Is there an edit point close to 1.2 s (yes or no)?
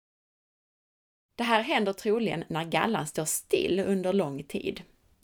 yes